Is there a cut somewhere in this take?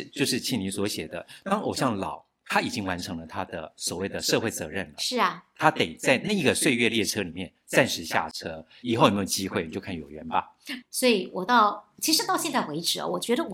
yes; 1 cut; at 10.8 s

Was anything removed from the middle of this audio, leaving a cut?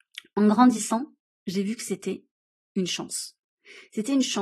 no; 0 cuts

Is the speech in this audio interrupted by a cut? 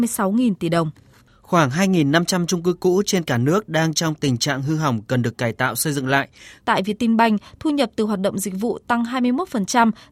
yes; 1 cut; at 6.6 s

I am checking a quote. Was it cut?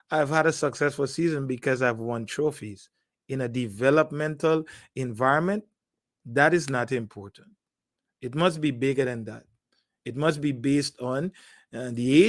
no; 0 cuts

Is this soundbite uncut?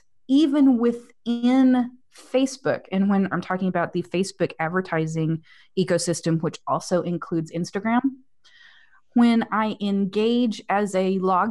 no; 1 cut; at 3.3 s

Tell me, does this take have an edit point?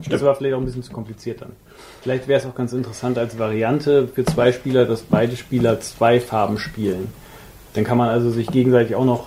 yes; 1 cut; at 2.0 s

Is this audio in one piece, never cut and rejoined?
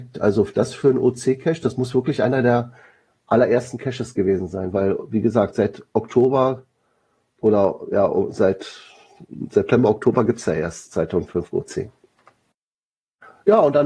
yes; 0 cuts

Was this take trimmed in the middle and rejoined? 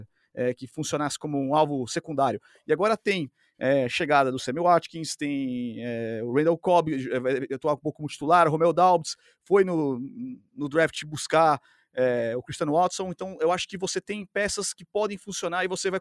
no; 0 cuts

